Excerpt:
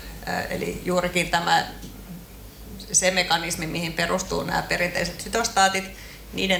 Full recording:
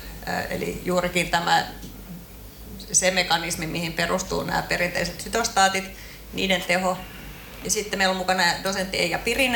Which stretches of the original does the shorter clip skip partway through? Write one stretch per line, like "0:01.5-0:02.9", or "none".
none